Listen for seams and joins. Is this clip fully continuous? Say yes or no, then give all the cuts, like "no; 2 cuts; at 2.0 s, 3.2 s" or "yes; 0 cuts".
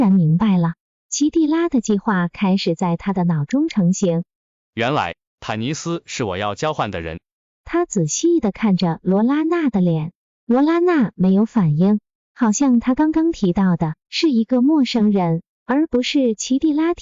yes; 0 cuts